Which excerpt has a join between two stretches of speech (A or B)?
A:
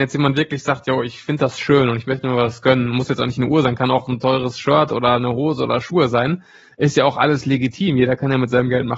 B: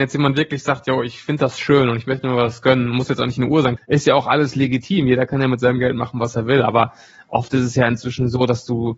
B